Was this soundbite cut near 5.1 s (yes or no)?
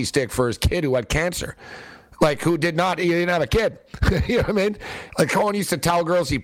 yes